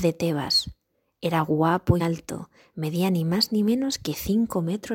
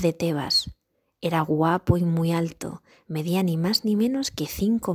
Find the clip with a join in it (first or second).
first